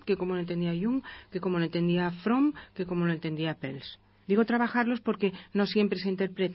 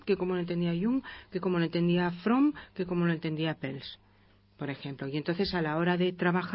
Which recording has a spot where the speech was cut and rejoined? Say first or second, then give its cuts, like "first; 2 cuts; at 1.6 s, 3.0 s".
first; 1 cut; at 4.2 s